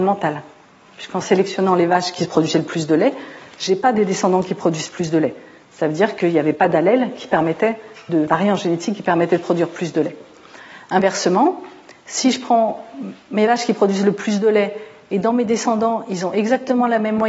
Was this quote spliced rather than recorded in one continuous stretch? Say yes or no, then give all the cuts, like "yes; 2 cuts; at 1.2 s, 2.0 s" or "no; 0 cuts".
no; 0 cuts